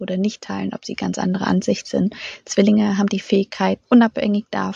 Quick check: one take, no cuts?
no; 1 cut; at 3.8 s

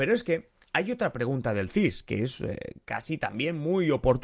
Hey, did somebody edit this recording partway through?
no; 0 cuts

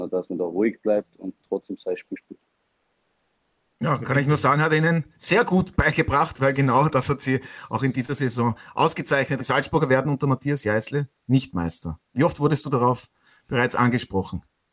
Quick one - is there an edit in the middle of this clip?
yes; 1 cut; at 9.4 s

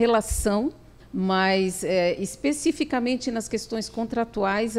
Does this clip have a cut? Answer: yes; 1 cut; at 1.0 s

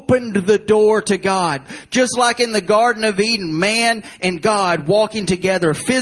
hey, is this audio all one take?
yes; 0 cuts

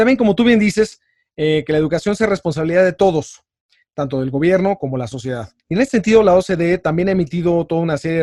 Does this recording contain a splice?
yes; 1 cut; at 5.6 s

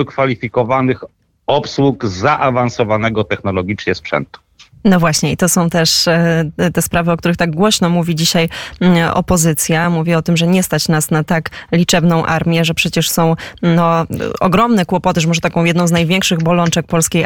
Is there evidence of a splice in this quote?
no; 0 cuts

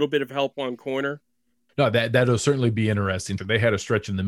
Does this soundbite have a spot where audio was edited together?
yes; 1 cut; at 3.4 s

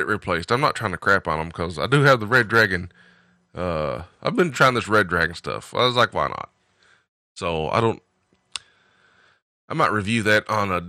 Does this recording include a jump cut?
yes; 1 cut; at 4.5 s

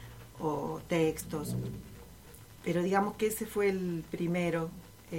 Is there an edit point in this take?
no; 0 cuts

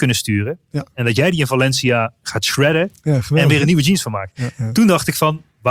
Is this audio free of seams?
yes; 0 cuts

